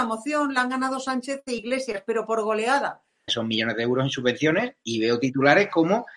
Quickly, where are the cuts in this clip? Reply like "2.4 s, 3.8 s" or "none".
3.3 s

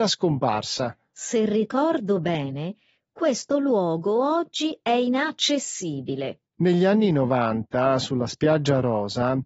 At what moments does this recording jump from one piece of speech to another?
6.5 s

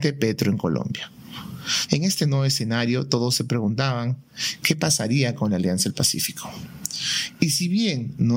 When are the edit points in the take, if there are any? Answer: 1.9 s

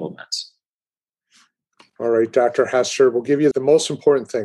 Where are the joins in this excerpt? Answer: 3.5 s

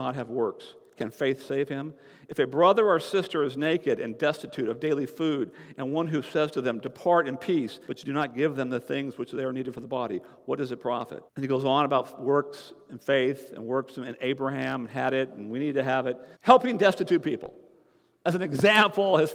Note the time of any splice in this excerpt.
7.8 s, 11.3 s, 16.3 s

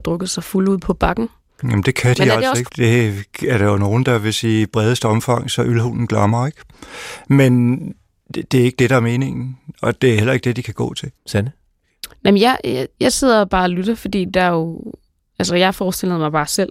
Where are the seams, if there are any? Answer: 2.7 s, 11.2 s

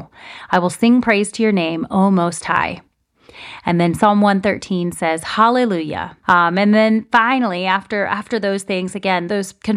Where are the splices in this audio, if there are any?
6.2 s

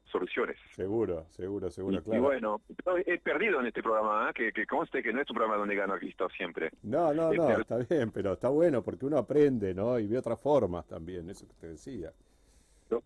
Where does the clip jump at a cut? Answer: none

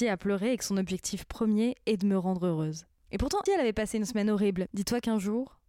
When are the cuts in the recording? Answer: 3.5 s, 4.7 s

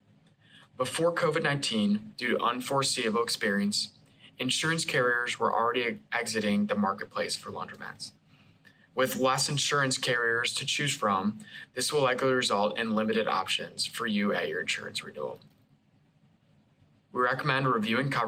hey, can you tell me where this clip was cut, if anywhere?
17.0 s

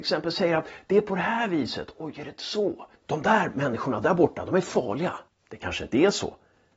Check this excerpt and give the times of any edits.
3.0 s, 5.3 s

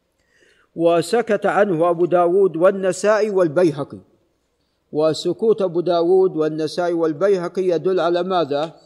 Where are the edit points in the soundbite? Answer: none

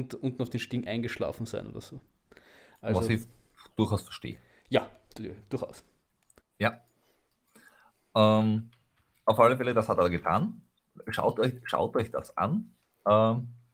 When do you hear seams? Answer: 6.4 s

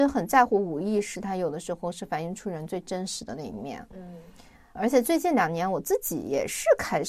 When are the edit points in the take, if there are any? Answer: 1.1 s

